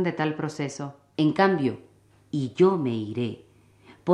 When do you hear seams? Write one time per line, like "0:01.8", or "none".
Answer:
0:01.1